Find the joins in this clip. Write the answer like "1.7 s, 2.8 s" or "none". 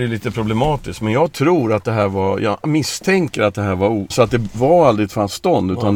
4.1 s